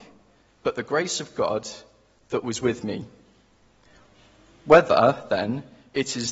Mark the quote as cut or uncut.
uncut